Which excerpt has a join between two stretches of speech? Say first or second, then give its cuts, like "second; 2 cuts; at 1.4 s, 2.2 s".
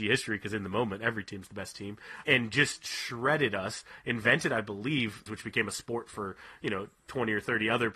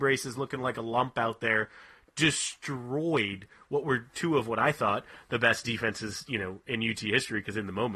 first; 2 cuts; at 2.2 s, 5.3 s